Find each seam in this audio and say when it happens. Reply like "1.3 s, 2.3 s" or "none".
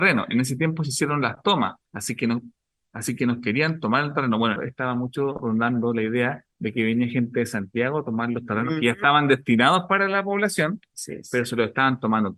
1.8 s, 4.6 s, 6.5 s